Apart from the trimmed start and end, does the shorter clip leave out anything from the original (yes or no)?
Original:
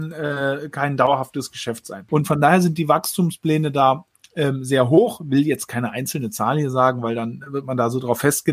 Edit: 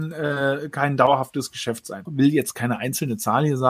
yes